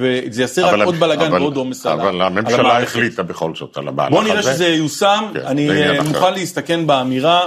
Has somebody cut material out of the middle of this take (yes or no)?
no